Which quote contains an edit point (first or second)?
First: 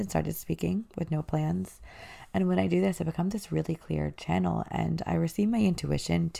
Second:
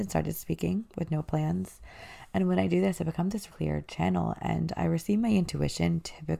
second